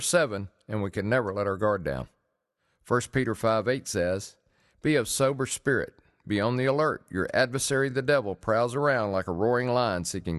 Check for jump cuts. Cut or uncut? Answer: uncut